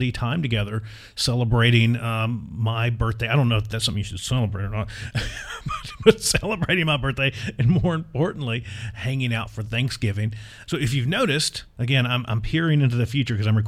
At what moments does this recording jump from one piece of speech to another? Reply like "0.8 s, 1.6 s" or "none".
10.6 s